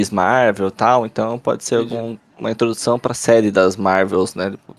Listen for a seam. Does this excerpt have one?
no; 0 cuts

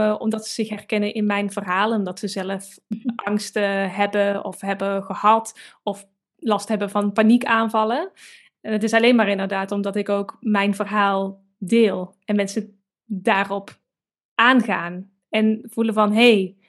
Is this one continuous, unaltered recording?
yes; 0 cuts

